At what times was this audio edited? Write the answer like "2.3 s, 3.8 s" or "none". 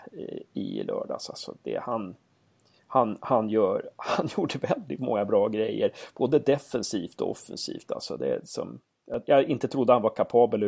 none

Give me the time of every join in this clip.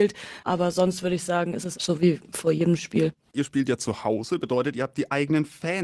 1.7 s

